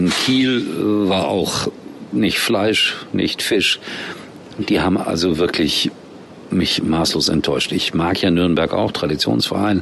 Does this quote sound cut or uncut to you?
uncut